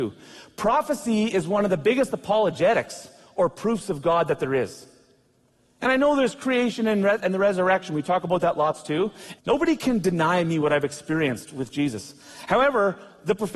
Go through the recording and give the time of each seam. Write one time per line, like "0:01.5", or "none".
0:09.3